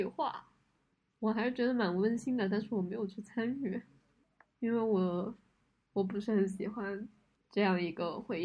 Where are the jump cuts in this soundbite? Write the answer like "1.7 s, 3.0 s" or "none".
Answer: none